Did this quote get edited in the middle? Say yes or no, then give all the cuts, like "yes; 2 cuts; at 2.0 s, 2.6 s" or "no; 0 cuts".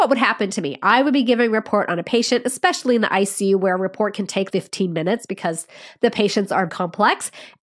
yes; 2 cuts; at 4.5 s, 6.7 s